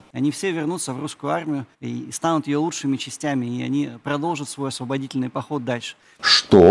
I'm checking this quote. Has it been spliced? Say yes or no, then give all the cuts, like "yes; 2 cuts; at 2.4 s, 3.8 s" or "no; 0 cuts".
yes; 1 cut; at 1.7 s